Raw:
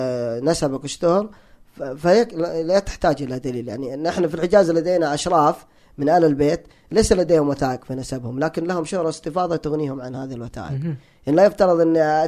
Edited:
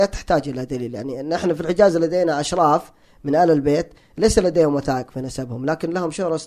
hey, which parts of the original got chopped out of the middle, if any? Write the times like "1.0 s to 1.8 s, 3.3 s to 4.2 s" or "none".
none